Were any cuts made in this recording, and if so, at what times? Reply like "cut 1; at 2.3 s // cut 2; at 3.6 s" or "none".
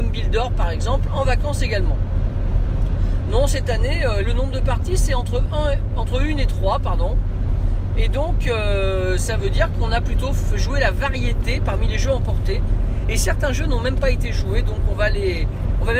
cut 1; at 4.2 s